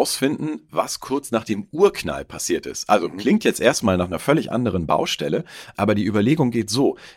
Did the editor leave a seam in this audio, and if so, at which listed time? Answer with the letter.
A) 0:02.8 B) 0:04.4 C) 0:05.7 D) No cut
C